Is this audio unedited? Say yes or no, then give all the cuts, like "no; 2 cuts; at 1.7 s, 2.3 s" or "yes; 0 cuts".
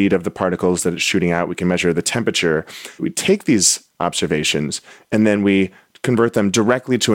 yes; 0 cuts